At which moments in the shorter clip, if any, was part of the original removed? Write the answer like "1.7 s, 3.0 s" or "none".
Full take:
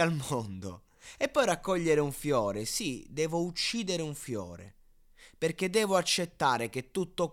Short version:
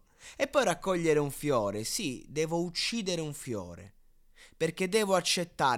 none